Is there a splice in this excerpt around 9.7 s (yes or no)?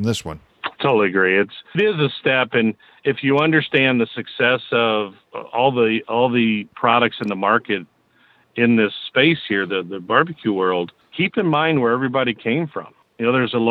no